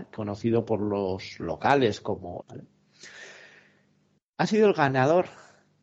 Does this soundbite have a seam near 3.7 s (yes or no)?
no